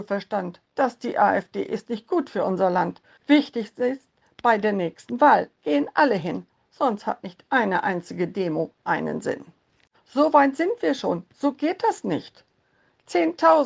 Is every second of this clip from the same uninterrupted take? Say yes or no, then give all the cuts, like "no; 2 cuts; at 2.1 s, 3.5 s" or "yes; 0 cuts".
no; 2 cuts; at 3.2 s, 9.9 s